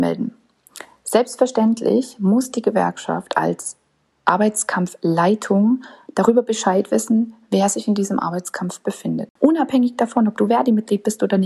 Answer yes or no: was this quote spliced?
no